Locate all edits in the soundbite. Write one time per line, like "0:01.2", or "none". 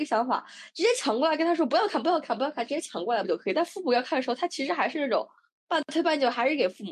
0:03.2